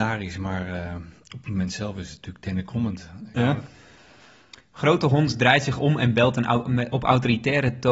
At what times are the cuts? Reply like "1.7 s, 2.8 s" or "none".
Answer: 3.4 s